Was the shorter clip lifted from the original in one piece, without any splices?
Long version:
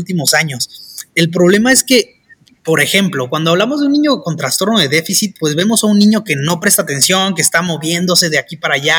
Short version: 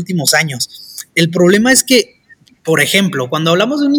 yes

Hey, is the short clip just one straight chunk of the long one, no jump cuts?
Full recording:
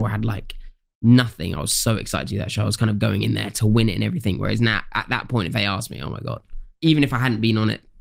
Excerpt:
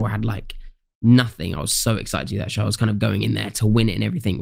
yes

